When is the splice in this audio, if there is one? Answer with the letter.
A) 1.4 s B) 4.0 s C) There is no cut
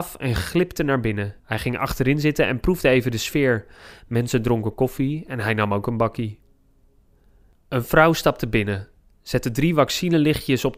A